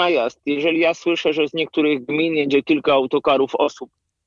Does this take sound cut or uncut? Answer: uncut